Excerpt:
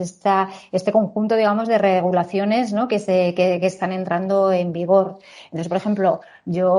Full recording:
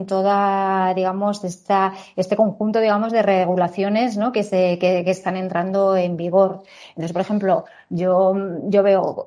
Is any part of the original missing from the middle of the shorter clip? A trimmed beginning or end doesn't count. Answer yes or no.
no